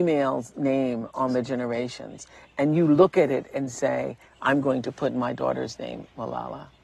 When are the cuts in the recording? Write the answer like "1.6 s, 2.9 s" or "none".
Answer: none